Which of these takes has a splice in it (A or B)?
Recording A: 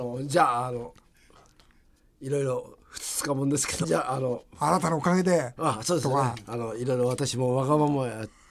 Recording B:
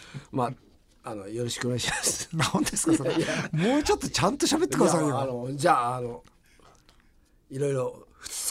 A